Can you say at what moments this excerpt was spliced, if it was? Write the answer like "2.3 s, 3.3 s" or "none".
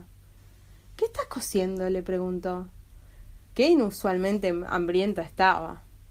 3.4 s